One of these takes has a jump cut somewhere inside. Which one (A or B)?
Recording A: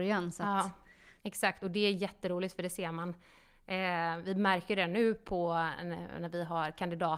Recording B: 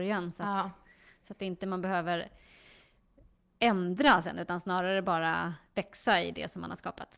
A